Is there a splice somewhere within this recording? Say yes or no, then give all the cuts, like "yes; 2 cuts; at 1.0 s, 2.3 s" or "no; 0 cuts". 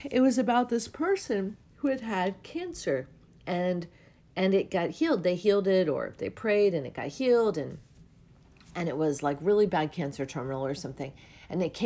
no; 0 cuts